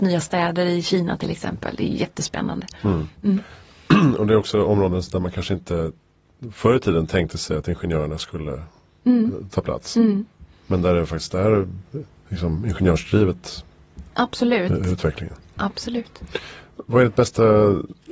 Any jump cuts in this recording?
no; 0 cuts

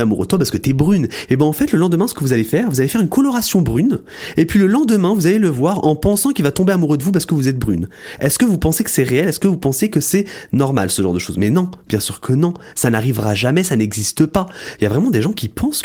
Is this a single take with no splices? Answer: no; 2 cuts; at 1.3 s, 14.8 s

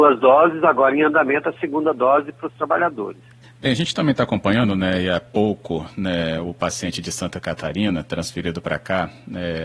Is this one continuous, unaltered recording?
no; 1 cut; at 3.4 s

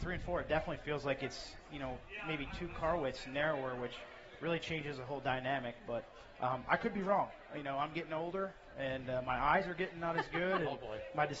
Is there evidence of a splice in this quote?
no; 0 cuts

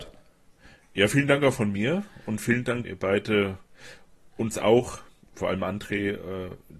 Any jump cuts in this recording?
yes; 2 cuts; at 2.8 s, 5.3 s

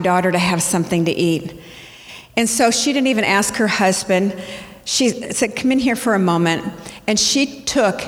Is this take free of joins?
yes; 0 cuts

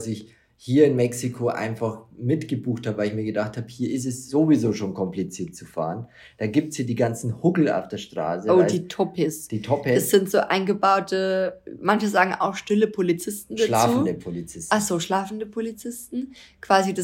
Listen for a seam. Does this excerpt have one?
no; 0 cuts

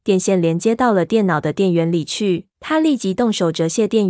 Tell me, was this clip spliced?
yes; 1 cut; at 2.5 s

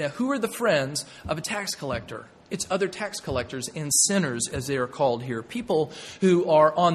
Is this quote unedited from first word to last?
no; 1 cut; at 2.5 s

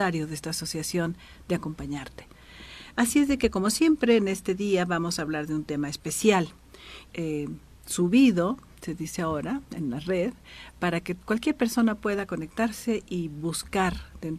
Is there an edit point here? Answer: yes; 2 cuts; at 2.9 s, 7.1 s

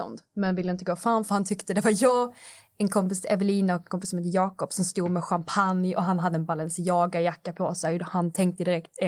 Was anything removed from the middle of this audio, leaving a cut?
no; 0 cuts

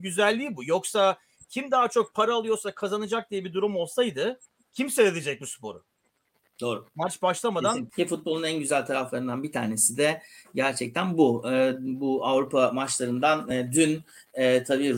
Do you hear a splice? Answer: yes; 1 cut; at 7.9 s

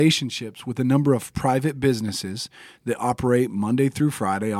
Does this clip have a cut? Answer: no; 0 cuts

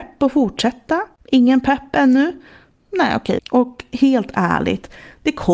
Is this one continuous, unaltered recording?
no; 2 cuts; at 1.2 s, 3.4 s

